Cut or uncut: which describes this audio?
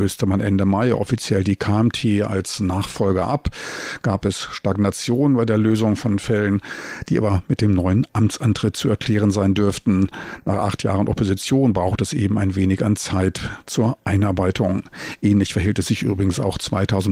uncut